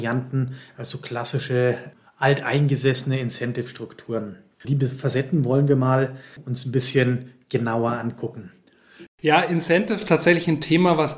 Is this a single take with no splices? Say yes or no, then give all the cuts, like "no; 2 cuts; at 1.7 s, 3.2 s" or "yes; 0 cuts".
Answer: no; 2 cuts; at 4.6 s, 9.1 s